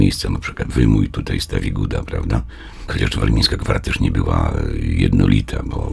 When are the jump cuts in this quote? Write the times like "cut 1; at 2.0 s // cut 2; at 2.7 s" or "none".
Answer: cut 1; at 2.9 s